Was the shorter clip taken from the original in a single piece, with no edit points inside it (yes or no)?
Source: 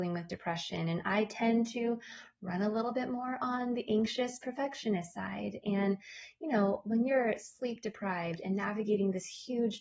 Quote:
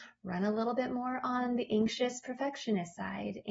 yes